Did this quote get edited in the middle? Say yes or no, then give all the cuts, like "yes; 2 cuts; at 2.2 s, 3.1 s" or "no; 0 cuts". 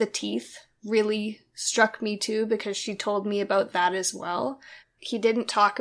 yes; 1 cut; at 4.8 s